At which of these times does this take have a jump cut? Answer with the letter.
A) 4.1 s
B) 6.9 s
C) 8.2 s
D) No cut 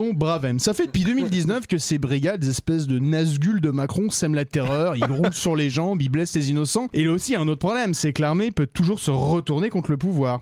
B